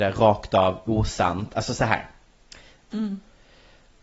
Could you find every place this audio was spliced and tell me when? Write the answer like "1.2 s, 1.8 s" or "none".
2.9 s